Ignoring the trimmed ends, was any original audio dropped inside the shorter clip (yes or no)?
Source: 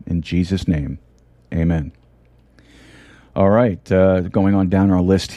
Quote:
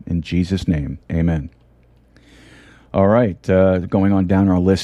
yes